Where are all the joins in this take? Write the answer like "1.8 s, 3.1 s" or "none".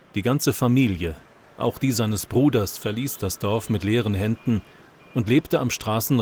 none